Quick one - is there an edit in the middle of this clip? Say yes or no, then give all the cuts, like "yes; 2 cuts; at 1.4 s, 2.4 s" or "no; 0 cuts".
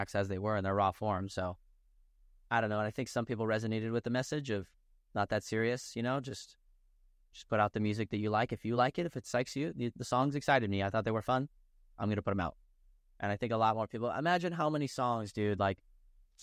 no; 0 cuts